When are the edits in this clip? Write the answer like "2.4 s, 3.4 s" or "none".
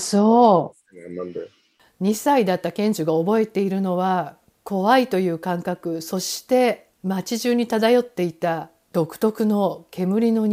none